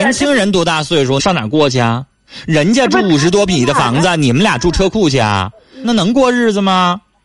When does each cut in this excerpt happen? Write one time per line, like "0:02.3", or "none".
0:01.2
0:05.8